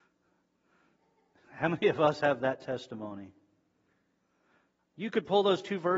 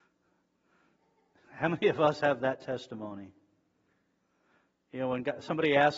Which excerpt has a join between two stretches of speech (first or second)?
first